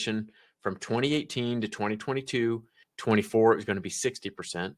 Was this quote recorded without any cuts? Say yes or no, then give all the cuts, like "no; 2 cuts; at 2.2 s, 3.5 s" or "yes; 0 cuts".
no; 1 cut; at 2.8 s